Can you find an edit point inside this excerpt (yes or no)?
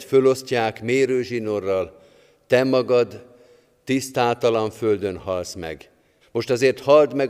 yes